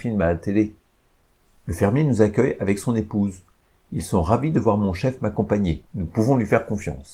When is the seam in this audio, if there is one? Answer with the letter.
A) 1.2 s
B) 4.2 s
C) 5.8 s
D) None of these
C